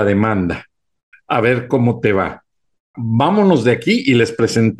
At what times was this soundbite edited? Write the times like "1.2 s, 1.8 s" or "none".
1.1 s, 2.9 s